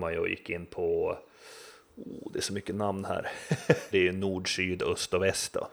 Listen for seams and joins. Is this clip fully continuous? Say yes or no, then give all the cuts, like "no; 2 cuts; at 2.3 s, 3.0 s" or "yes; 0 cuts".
no; 1 cut; at 3.9 s